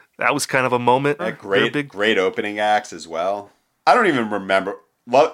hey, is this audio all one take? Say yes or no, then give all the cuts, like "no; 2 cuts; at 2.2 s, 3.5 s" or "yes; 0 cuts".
no; 2 cuts; at 1.2 s, 3.8 s